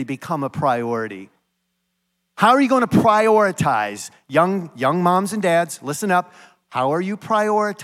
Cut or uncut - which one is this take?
cut